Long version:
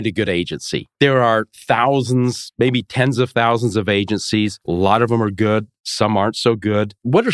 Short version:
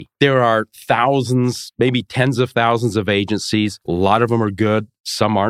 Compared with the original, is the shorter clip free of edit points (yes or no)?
yes